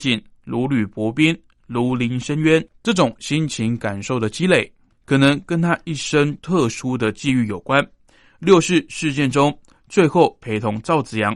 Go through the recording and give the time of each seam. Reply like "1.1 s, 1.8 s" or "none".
2.7 s